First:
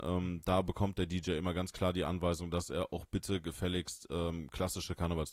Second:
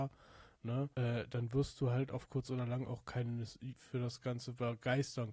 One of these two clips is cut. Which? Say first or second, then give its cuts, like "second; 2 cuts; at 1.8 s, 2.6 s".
second; 2 cuts; at 0.9 s, 3.8 s